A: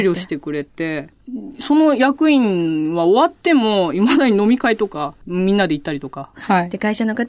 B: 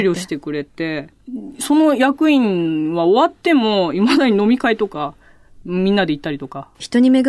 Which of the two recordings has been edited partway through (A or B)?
A